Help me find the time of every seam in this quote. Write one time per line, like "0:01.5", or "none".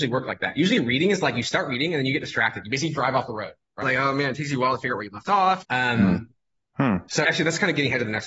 0:03.8
0:05.6
0:07.2